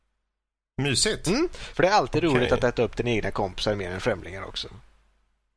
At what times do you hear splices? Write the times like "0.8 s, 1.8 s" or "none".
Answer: 1.7 s